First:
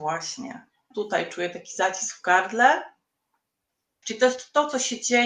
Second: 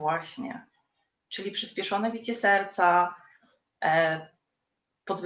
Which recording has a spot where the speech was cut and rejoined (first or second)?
first